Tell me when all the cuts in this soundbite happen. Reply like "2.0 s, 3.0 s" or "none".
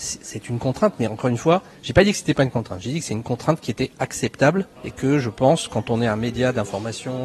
4.8 s